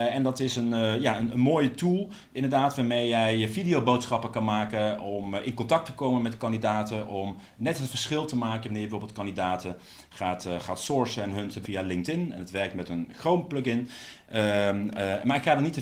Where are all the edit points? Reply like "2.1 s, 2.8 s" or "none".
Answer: 11.6 s